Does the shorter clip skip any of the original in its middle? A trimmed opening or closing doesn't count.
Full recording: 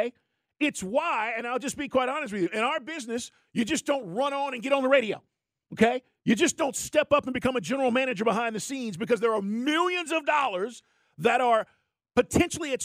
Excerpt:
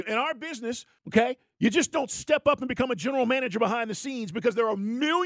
yes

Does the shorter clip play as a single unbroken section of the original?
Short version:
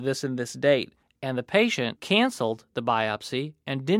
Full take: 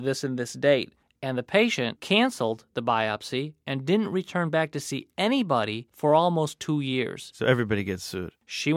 yes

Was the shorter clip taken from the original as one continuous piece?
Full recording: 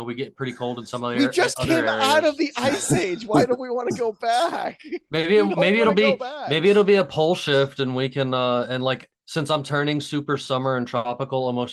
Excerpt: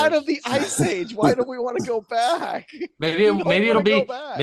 yes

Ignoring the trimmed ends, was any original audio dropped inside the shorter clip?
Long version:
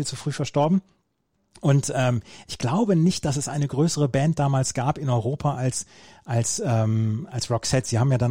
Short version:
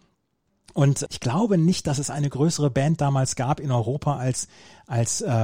yes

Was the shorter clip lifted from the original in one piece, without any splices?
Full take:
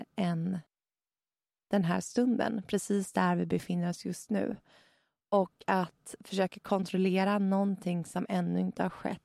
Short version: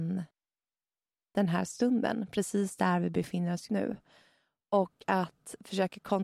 no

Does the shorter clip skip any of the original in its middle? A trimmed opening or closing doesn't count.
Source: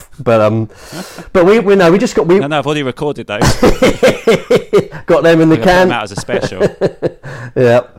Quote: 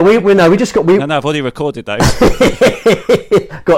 no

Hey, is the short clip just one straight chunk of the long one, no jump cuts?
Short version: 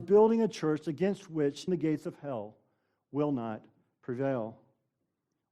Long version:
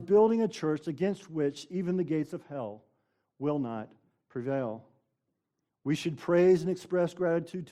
no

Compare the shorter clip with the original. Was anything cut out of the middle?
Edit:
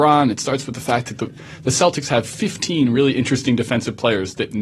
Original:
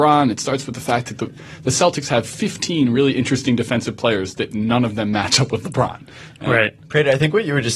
no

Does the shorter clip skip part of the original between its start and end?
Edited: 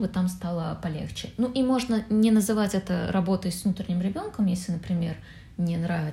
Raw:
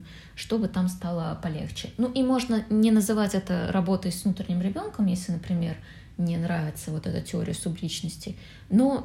no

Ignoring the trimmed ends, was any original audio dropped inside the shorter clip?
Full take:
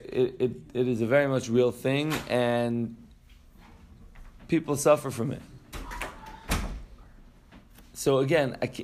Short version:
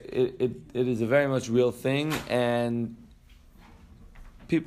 no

